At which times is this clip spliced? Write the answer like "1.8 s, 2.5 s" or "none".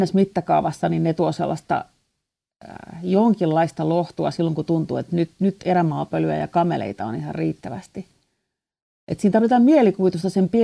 none